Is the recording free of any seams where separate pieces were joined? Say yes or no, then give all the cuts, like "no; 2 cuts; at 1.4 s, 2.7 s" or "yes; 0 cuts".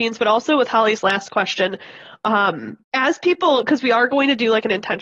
no; 1 cut; at 2.8 s